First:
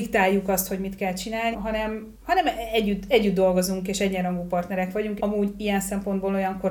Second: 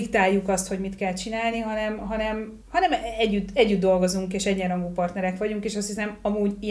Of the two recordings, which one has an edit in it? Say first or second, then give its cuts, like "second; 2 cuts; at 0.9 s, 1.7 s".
first; 2 cuts; at 1.5 s, 5.2 s